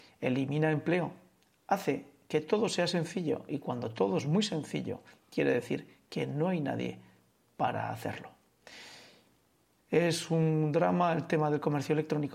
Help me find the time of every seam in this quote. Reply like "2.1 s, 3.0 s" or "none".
none